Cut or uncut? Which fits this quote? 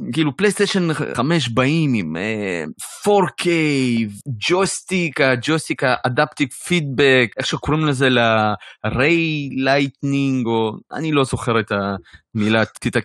uncut